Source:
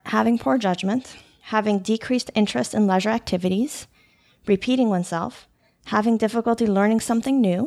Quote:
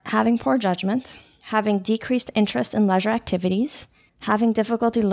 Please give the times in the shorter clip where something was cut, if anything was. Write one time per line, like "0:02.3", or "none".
0:04.1